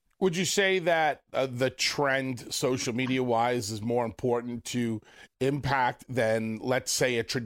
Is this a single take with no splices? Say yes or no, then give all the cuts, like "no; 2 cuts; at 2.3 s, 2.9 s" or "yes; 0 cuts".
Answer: yes; 0 cuts